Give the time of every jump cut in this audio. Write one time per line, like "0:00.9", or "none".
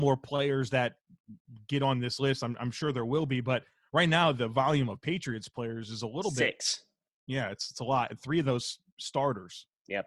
none